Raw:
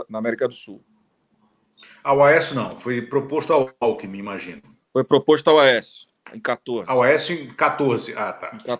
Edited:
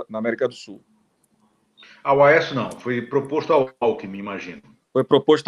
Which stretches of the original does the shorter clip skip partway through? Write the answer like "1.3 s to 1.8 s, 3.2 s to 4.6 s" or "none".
none